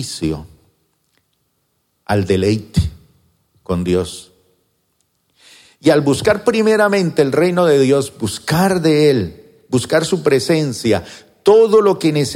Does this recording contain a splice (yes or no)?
no